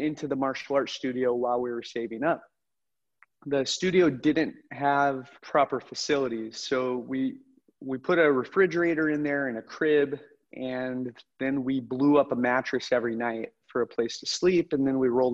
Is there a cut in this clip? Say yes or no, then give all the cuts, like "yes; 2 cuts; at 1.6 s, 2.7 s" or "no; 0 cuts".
yes; 1 cut; at 5.4 s